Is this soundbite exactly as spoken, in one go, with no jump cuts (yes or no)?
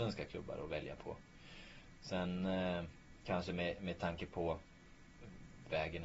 yes